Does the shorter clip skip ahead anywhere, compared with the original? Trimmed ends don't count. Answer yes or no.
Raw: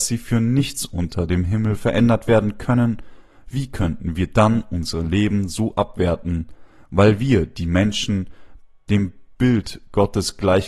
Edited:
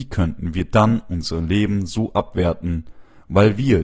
no